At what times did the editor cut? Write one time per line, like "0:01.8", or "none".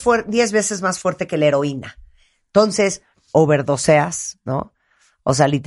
0:03.3